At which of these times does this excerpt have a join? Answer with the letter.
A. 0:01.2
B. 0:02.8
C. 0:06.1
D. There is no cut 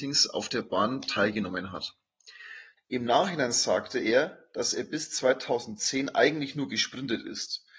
B